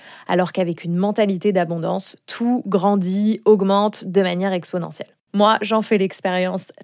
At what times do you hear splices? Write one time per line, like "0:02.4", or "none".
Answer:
0:05.3